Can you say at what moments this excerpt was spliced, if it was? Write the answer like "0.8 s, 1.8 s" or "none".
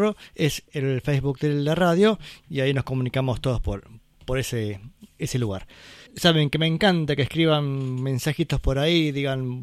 6.1 s